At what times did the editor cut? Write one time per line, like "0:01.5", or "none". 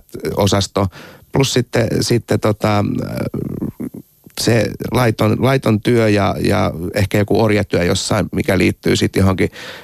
none